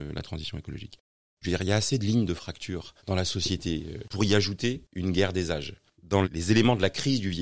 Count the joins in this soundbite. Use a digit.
3